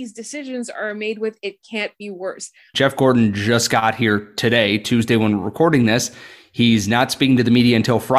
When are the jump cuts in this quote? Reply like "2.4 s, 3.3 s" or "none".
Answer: 2.7 s

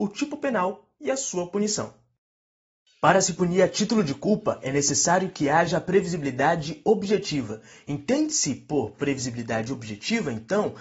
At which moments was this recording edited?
none

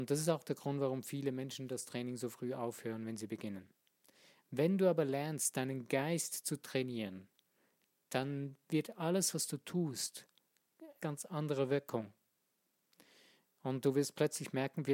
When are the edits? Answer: 11.0 s

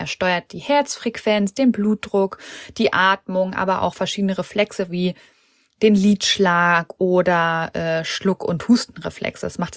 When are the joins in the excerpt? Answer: none

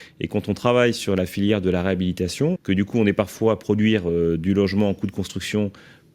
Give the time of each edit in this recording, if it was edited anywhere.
2.6 s

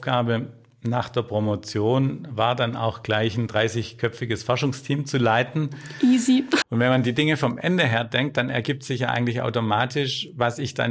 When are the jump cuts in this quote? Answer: 6.6 s

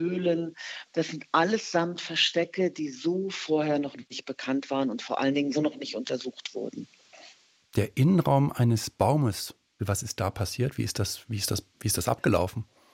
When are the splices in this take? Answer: 5.5 s, 9.8 s

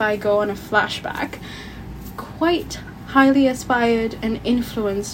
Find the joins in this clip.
none

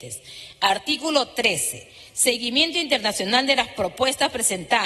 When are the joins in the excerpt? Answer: none

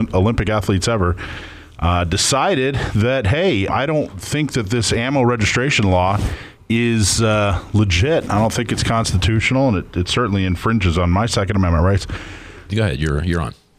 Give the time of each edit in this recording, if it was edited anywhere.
3.7 s, 12.7 s

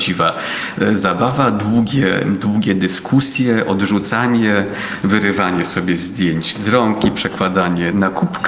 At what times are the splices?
none

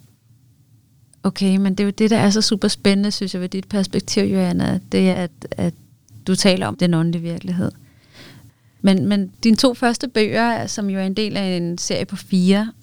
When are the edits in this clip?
5.1 s, 6.7 s

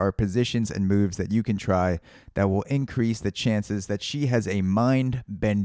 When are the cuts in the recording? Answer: none

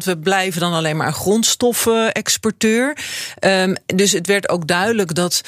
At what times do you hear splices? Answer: none

